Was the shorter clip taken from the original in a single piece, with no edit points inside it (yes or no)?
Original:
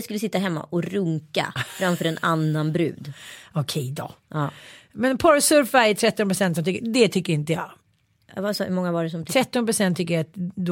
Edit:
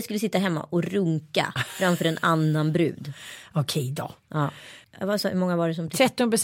no